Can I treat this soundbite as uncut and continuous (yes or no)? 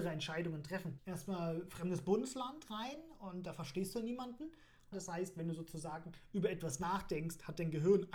no